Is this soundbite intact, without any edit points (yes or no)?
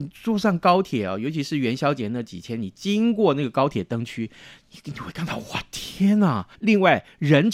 no